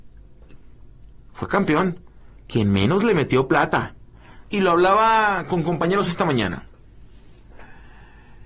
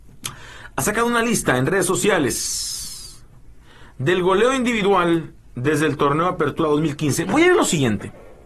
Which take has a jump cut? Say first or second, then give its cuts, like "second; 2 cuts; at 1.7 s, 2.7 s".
first; 2 cuts; at 1.3 s, 4.4 s